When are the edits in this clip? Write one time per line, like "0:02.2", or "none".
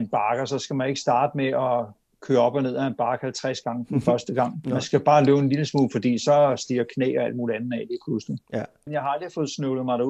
0:08.9